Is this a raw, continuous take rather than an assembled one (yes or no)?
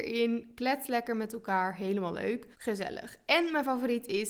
no